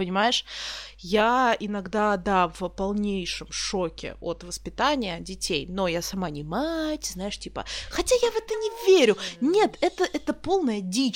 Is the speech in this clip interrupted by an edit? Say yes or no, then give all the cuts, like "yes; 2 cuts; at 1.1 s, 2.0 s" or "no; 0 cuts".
no; 0 cuts